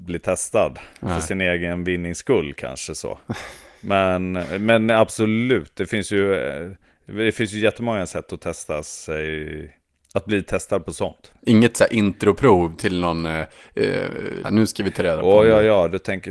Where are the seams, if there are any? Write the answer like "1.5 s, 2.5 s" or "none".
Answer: 11.4 s, 14.4 s